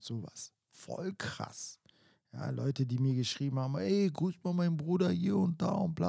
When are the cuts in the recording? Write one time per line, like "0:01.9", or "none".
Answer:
none